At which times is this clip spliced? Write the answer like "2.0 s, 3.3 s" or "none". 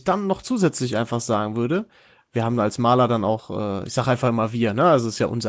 none